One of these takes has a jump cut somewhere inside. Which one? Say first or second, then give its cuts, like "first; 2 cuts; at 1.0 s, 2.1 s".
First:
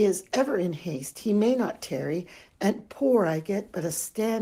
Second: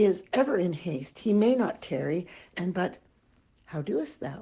second; 1 cut; at 2.5 s